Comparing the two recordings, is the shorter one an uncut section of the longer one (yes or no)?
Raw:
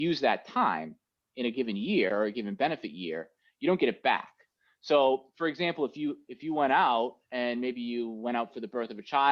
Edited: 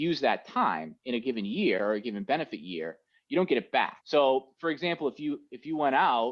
no